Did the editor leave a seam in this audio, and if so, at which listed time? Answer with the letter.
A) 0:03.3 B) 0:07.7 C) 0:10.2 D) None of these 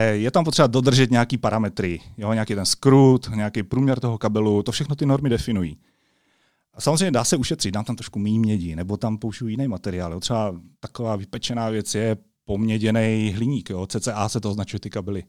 D